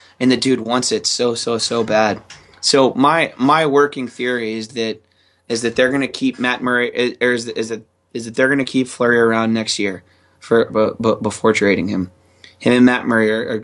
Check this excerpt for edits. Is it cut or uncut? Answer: cut